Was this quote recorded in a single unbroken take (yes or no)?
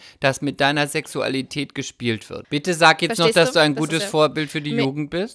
no